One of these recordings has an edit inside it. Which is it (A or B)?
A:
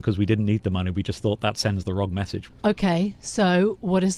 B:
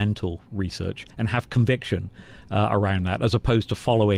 A